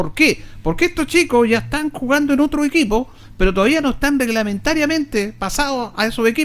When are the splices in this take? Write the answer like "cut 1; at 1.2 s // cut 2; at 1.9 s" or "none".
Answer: none